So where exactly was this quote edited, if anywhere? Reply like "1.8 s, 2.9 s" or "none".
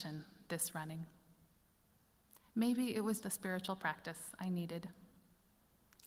3.2 s